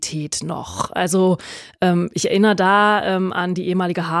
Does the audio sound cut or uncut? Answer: uncut